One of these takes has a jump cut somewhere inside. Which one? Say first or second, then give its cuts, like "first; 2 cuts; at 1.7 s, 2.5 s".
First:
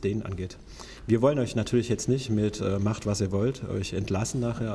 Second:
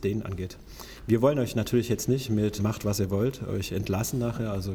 second; 1 cut; at 2.6 s